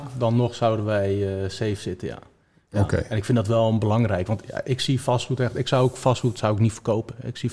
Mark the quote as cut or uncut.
uncut